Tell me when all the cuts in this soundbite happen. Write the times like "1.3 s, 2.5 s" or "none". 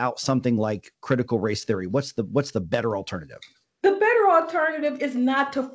none

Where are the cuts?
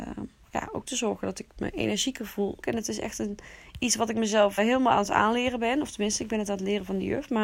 2.6 s, 4.6 s

